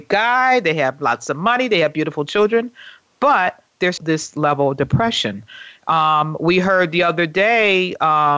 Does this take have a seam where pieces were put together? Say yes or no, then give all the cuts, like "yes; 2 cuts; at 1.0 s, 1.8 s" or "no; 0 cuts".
yes; 1 cut; at 4.0 s